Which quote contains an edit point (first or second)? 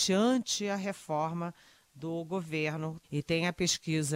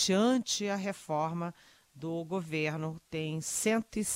first